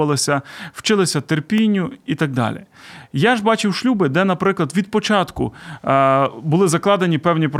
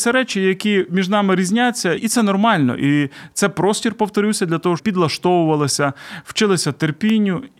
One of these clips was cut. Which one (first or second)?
second